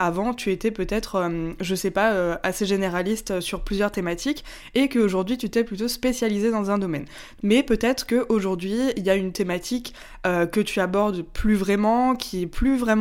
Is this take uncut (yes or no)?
no